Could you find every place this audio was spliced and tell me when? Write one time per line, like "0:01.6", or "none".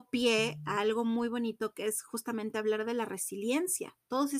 none